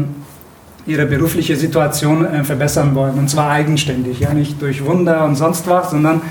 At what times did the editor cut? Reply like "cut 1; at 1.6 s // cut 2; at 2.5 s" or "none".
none